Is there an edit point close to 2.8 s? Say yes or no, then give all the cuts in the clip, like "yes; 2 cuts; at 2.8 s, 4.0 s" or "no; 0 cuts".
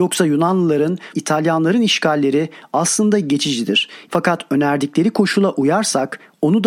no; 2 cuts; at 1.1 s, 4.1 s